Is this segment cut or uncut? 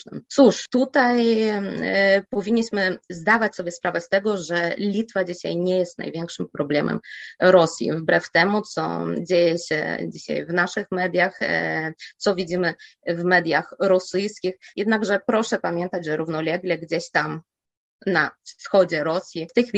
cut